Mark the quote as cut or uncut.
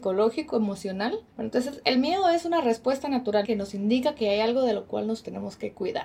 cut